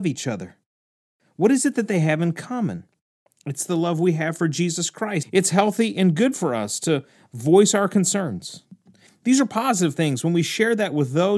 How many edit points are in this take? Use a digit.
2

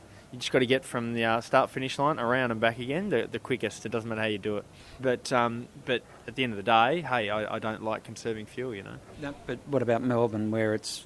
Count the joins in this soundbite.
1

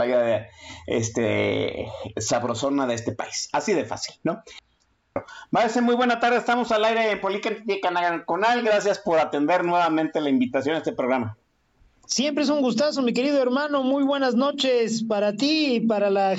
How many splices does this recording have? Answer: 0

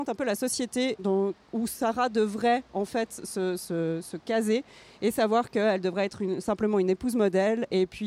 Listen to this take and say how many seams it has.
1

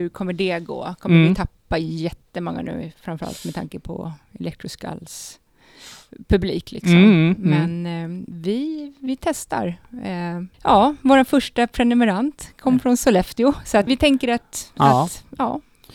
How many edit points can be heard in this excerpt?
2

